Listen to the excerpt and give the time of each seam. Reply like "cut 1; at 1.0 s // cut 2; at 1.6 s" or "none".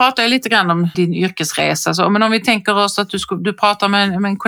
cut 1; at 0.9 s